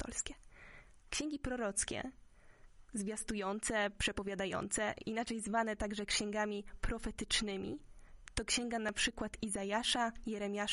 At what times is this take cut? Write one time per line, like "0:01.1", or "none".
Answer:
none